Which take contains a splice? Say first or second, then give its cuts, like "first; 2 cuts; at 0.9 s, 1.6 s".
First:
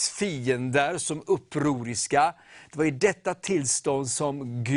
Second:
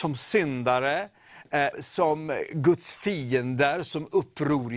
second; 1 cut; at 1.7 s